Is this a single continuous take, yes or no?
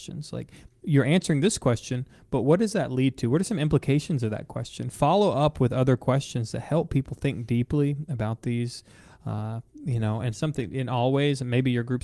yes